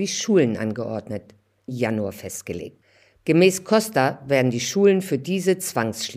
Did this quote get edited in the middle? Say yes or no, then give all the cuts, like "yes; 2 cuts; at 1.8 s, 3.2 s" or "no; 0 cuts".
yes; 1 cut; at 1.7 s